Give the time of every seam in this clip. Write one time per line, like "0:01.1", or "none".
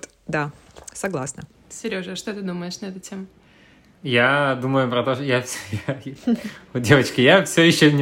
none

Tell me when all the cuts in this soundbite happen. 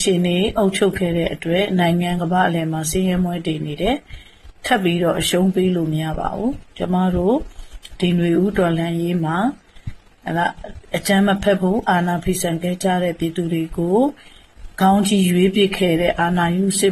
0:02.2

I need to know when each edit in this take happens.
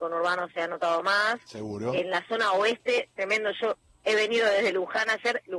none

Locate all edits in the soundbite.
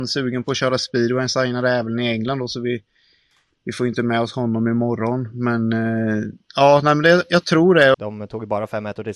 0:06.4
0:07.9

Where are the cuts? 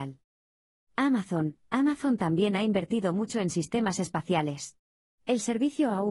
none

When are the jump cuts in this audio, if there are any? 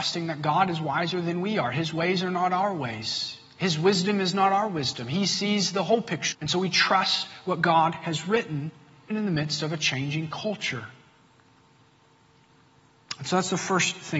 0:06.3
0:09.1

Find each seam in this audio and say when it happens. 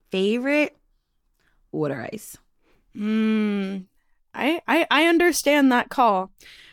none

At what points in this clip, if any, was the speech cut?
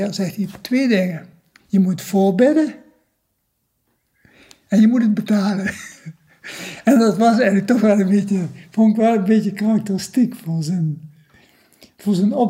none

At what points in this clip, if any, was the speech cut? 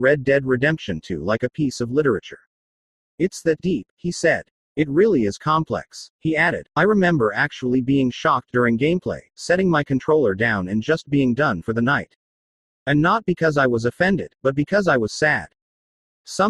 none

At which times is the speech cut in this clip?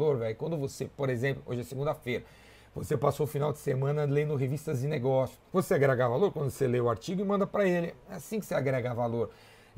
0:05.5

